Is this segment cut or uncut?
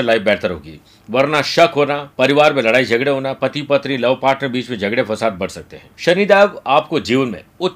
cut